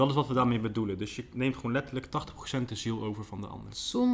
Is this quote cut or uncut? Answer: uncut